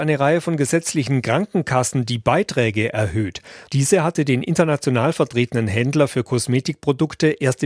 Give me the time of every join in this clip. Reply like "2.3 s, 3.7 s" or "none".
3.7 s